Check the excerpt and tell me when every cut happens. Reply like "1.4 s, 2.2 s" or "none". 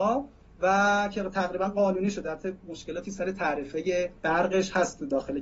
4.2 s